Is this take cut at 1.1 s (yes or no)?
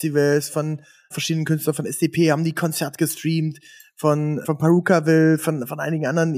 yes